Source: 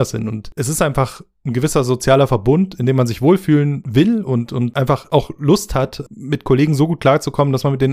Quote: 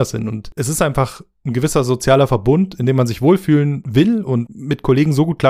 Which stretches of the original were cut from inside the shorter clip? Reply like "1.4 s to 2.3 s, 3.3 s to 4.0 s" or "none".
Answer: 4.5 s to 6.1 s